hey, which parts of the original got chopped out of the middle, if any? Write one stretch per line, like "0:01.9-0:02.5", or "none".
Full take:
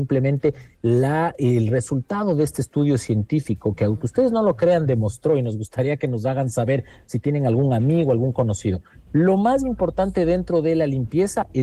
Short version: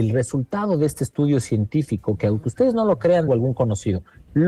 0:04.9-0:08.1